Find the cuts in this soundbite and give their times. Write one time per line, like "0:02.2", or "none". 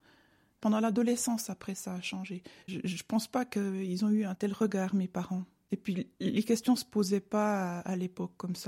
0:02.6